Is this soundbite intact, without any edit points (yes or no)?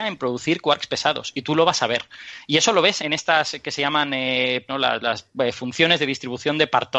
no